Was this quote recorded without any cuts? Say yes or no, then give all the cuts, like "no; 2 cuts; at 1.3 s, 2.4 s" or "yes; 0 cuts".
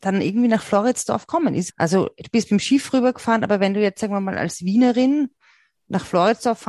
no; 1 cut; at 1.7 s